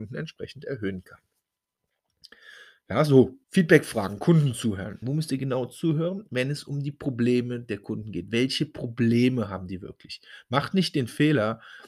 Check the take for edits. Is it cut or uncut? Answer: cut